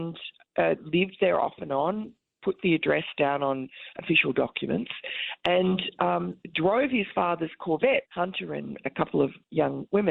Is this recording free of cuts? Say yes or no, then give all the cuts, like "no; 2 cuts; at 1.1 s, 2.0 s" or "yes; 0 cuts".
no; 1 cut; at 8.0 s